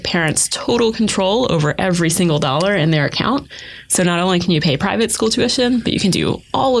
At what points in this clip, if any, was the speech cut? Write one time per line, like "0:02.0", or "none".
none